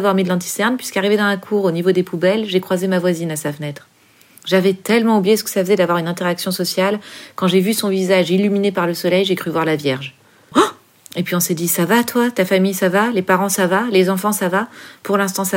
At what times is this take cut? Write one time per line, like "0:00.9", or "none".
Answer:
0:10.5